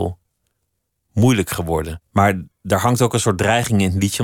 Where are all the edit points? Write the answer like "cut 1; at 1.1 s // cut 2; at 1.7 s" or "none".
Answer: cut 1; at 2.0 s